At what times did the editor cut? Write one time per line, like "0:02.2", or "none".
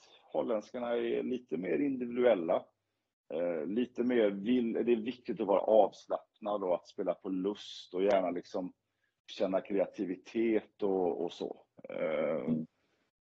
none